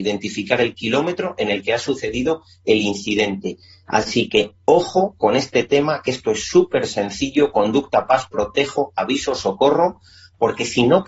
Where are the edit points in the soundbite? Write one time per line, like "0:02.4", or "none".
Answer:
0:03.9